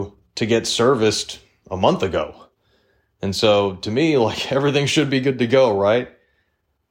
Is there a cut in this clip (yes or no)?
no